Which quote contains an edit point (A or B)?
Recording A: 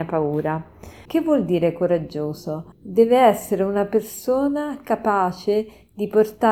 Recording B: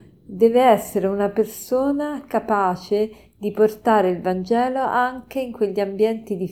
A